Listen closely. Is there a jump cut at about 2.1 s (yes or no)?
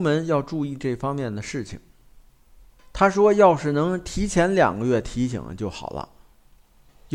no